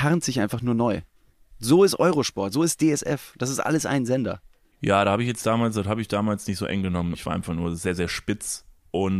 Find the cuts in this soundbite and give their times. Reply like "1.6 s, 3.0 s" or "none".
7.1 s